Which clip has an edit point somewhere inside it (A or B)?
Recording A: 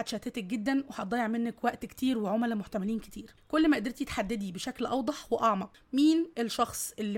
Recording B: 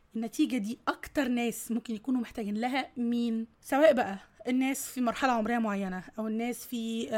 B